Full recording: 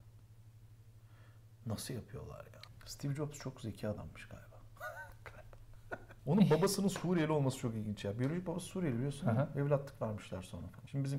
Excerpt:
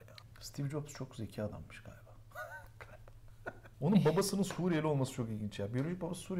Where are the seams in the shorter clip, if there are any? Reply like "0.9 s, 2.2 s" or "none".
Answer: none